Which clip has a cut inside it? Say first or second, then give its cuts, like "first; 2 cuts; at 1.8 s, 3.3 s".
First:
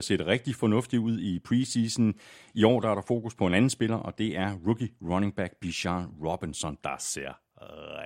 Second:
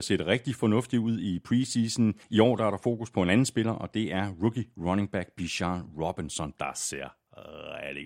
second; 1 cut; at 2.2 s